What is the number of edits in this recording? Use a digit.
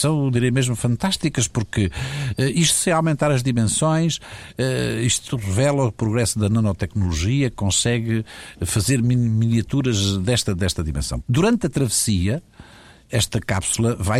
1